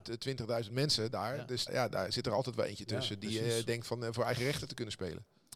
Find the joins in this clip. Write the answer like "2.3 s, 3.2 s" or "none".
1.7 s